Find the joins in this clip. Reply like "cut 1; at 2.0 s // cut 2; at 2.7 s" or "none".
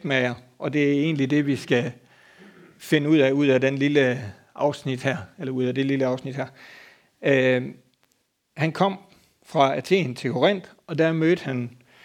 none